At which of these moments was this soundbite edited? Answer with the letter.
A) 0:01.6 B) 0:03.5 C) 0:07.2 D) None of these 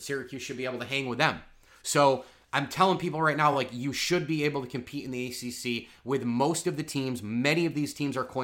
D